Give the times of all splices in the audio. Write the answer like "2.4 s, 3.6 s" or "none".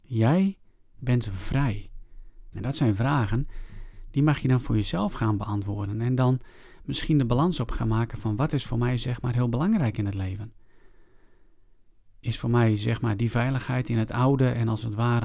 2.5 s